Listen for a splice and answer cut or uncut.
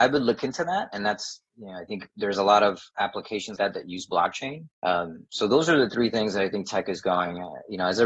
cut